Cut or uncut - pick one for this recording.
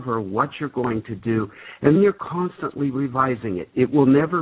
cut